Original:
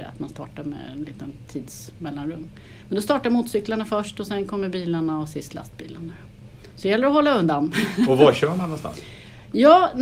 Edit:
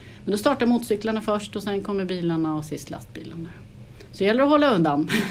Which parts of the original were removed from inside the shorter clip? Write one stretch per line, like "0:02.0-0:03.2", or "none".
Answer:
none